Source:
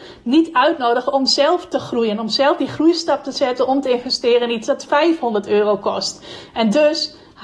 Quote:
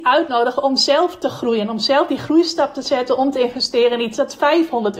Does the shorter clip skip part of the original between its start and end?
no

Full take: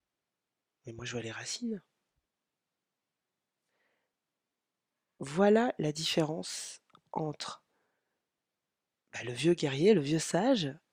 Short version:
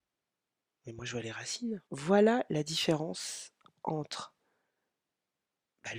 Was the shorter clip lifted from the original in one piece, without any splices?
no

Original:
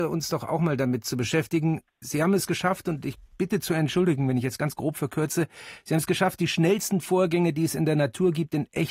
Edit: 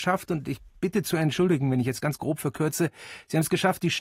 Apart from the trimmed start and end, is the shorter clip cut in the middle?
no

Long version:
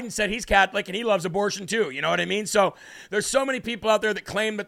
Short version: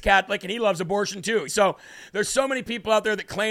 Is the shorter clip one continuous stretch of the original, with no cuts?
no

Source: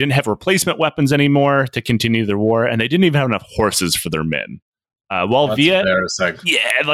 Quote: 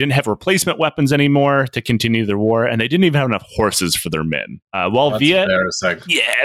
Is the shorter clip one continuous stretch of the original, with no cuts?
no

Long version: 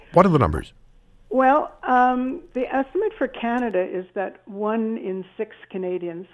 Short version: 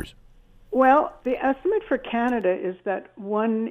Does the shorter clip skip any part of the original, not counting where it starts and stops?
yes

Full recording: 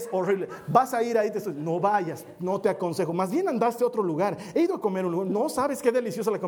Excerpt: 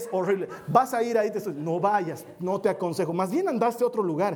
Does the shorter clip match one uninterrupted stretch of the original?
yes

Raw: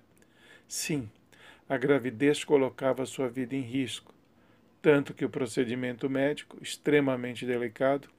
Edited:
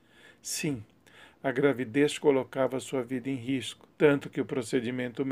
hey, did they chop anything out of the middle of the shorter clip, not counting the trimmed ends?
yes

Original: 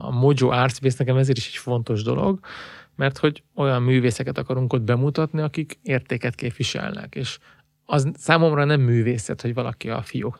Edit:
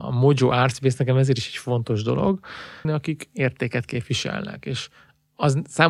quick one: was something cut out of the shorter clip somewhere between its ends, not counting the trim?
yes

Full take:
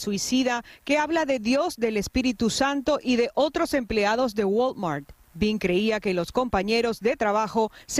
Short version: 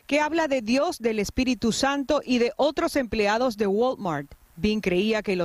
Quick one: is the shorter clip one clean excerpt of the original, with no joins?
yes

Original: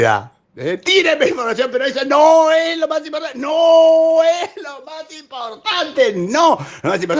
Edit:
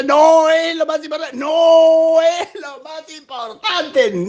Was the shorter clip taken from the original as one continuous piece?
yes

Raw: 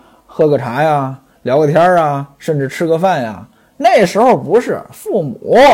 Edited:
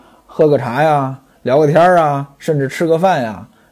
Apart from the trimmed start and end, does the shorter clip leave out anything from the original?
no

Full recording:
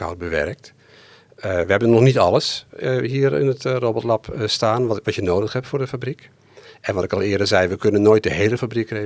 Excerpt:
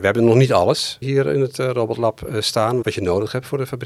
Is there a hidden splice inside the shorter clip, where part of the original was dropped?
yes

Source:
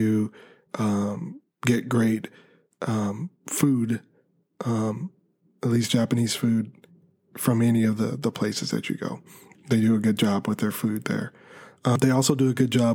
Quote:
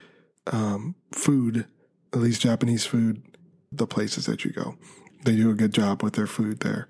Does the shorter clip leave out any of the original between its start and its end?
yes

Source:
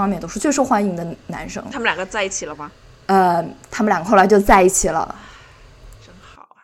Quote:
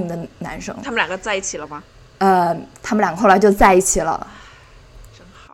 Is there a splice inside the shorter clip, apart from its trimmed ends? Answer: no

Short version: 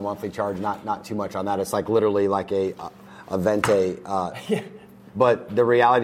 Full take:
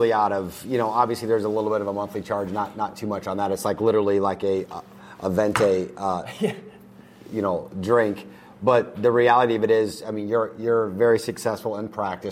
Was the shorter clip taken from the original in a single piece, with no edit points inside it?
no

